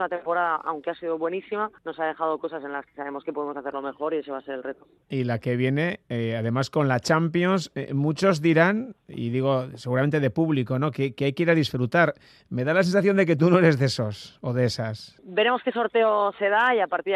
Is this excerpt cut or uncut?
uncut